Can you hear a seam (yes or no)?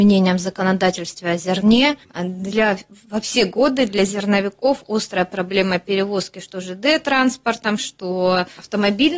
yes